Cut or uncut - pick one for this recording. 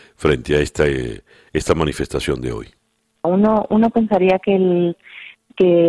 cut